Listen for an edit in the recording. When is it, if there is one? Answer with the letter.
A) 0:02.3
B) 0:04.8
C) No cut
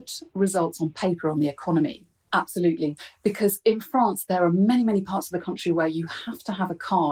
A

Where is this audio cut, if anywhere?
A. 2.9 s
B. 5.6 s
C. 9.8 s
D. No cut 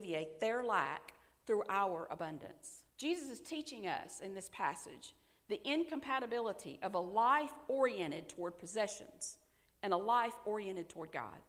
A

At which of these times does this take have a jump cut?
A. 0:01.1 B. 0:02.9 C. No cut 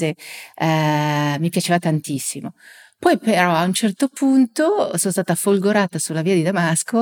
C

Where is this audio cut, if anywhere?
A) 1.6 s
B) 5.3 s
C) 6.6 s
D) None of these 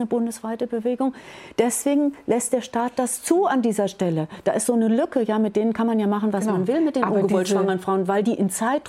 D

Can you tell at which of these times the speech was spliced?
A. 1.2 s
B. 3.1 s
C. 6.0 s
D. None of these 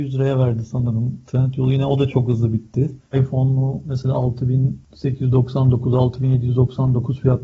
B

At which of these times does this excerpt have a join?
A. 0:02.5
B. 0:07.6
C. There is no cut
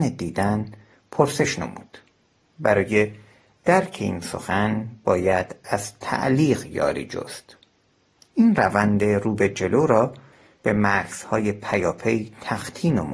C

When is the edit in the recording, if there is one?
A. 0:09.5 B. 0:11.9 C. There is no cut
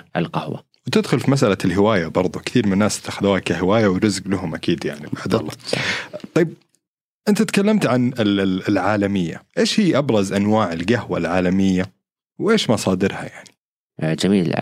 A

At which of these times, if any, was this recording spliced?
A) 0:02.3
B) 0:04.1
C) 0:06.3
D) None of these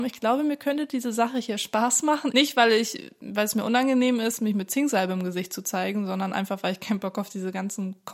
A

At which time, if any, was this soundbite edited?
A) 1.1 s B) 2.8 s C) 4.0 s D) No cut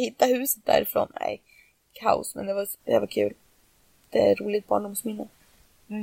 B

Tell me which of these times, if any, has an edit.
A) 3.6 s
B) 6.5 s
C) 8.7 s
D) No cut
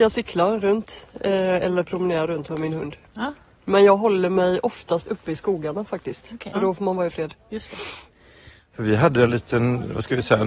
B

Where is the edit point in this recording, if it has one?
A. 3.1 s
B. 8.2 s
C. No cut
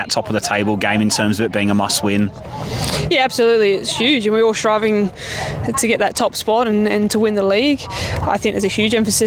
C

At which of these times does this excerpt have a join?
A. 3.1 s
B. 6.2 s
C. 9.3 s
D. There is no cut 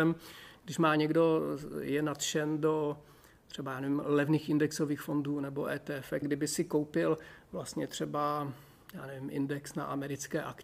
B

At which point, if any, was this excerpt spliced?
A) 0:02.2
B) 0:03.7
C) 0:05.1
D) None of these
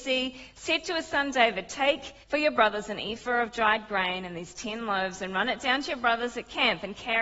A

